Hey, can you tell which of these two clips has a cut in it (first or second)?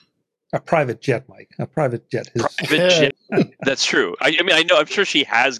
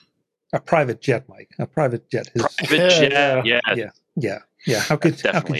first